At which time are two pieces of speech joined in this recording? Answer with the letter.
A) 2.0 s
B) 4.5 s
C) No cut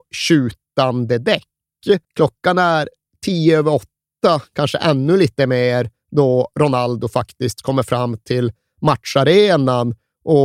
A